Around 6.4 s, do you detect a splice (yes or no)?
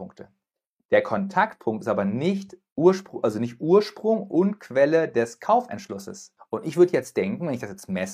yes